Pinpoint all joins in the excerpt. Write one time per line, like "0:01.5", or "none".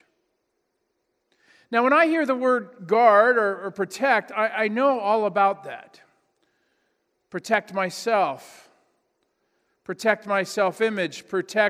none